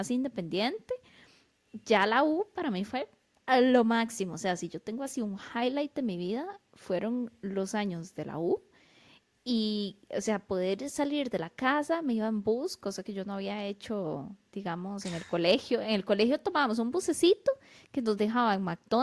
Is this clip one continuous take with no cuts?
yes; 0 cuts

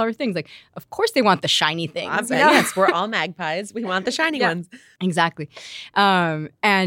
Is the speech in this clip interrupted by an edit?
no; 0 cuts

